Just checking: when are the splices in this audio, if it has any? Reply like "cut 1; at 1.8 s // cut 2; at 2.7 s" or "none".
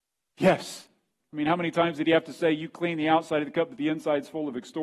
cut 1; at 1.2 s